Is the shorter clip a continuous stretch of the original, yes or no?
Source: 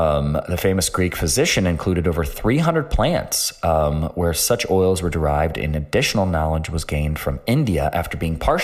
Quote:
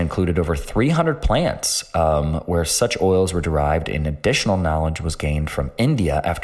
yes